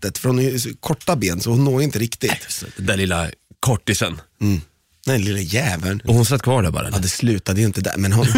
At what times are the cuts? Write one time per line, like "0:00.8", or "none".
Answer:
0:06.1